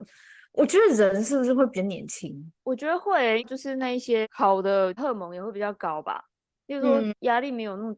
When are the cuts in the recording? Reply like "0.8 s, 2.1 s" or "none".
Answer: 2.6 s